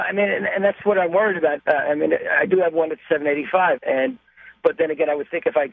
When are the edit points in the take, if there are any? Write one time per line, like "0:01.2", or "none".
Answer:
0:01.6
0:03.8